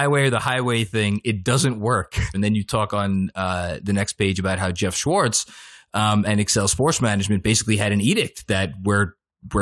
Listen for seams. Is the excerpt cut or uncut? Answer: cut